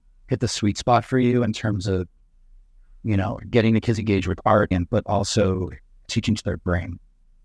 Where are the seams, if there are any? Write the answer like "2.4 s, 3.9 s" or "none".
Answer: 4.7 s